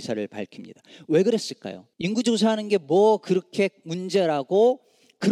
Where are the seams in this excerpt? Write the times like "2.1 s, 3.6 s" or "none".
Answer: 1.9 s